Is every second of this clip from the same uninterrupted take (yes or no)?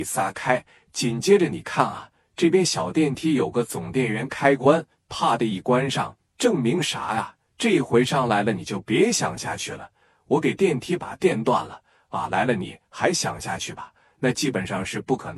yes